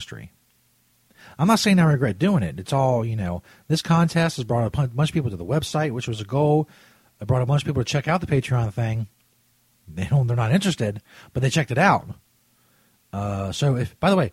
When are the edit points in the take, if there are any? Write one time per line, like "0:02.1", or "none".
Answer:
none